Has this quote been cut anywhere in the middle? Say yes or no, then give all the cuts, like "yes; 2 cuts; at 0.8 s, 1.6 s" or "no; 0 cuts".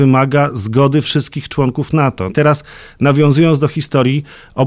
yes; 1 cut; at 2.3 s